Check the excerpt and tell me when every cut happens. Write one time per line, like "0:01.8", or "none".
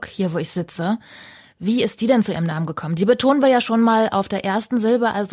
none